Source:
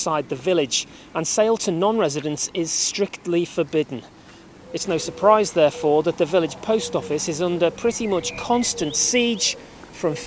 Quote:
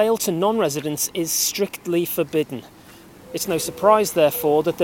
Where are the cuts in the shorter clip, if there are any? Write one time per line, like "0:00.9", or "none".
none